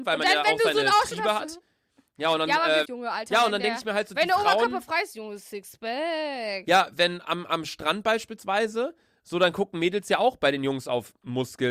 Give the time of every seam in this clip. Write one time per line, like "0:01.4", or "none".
0:02.8